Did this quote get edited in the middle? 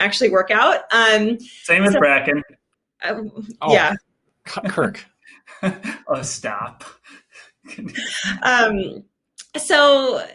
no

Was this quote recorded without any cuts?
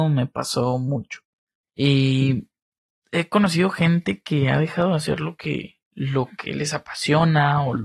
no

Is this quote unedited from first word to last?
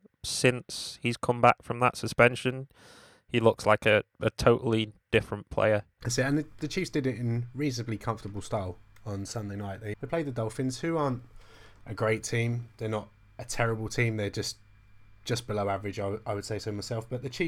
no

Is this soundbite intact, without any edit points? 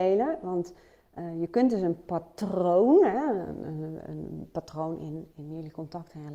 yes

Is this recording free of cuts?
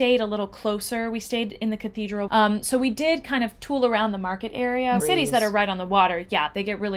no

